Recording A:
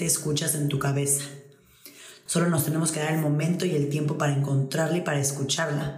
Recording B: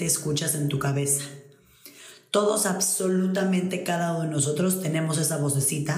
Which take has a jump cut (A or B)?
A